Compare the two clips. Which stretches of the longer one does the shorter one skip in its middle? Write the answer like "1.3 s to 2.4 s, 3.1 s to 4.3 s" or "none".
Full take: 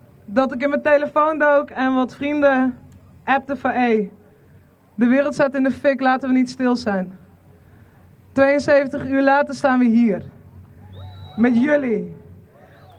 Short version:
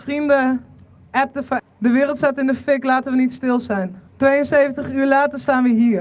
3.7 s to 4.8 s, 7.2 s to 8.2 s